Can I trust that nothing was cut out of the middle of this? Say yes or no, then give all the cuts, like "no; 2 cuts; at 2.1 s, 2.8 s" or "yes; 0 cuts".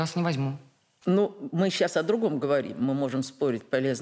no; 1 cut; at 1.0 s